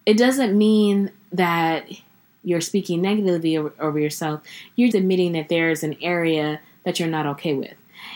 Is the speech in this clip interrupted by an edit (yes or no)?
yes